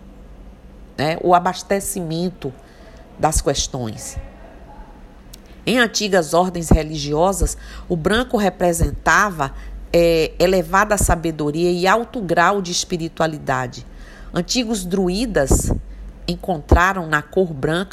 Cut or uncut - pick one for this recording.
uncut